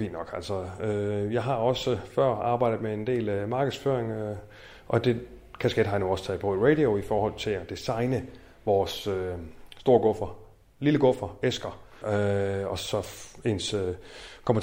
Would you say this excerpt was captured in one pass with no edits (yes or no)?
no